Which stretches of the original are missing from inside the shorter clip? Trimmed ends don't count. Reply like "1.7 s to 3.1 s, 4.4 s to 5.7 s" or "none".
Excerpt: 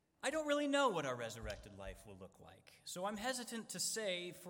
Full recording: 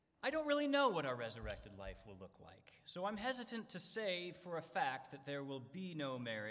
none